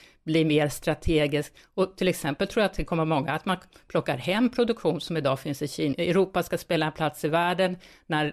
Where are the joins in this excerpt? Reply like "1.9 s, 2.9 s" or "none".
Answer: 5.9 s